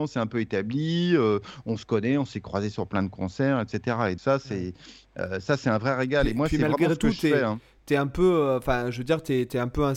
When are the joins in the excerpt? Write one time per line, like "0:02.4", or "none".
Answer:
0:04.2